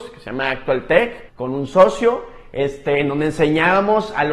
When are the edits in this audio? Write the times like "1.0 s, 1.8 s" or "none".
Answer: 1.3 s